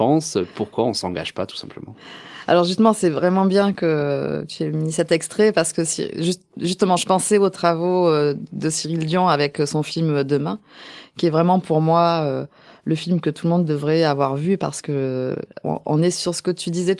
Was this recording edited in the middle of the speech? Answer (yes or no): no